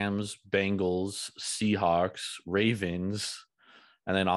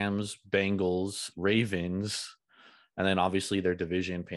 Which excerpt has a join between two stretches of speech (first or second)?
second